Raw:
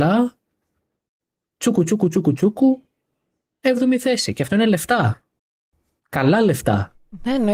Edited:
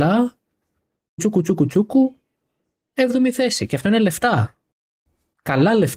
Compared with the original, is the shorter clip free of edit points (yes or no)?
no